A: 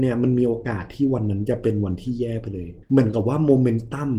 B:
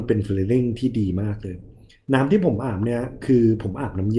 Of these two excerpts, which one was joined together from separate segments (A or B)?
A